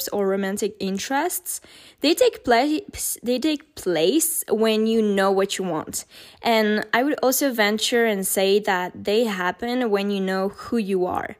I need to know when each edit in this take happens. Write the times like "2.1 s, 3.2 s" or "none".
none